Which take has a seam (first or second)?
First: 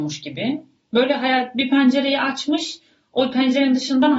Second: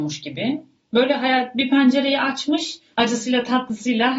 second